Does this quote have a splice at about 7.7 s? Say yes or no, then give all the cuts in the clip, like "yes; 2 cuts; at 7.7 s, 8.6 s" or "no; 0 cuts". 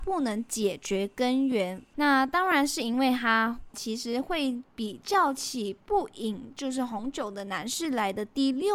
no; 2 cuts; at 1.9 s, 3.7 s